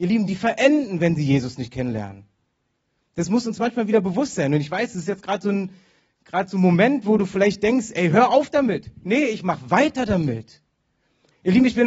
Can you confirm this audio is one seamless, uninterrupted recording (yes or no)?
yes